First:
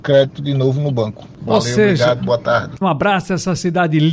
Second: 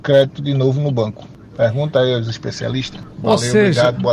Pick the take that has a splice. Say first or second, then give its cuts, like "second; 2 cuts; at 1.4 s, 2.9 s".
first; 2 cuts; at 1.4 s, 2.8 s